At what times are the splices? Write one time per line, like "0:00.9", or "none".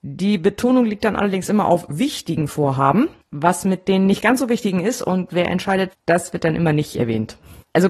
0:05.9